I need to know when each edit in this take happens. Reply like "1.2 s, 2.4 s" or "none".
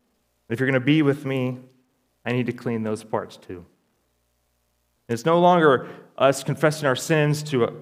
5.0 s